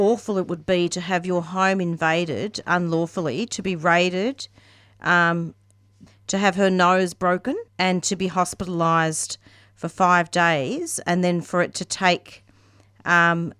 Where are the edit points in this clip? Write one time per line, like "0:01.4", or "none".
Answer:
0:06.1
0:07.7